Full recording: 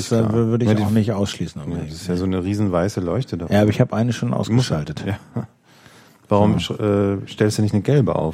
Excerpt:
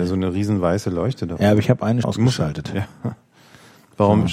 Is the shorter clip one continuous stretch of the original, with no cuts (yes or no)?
no